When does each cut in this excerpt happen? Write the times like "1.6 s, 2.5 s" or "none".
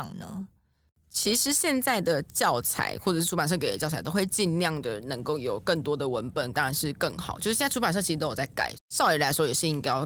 6.5 s, 8.7 s